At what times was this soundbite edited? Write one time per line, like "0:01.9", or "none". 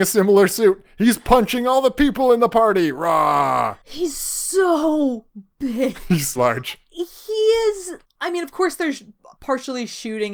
0:06.4